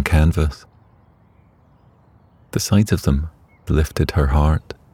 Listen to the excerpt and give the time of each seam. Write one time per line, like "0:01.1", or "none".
0:03.7